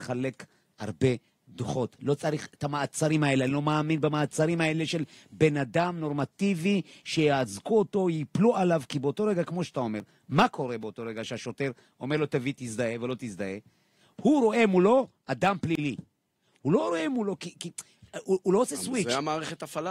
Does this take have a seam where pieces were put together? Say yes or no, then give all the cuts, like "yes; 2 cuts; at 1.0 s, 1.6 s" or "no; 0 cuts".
no; 0 cuts